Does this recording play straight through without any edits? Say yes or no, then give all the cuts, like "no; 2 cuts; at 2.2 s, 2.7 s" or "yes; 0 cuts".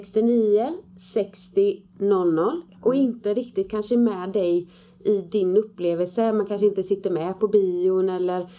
no; 1 cut; at 2.7 s